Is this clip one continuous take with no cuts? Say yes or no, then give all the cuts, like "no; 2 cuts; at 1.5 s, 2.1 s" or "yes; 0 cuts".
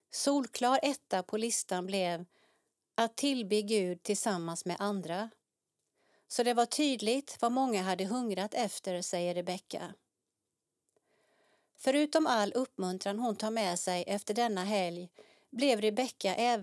yes; 0 cuts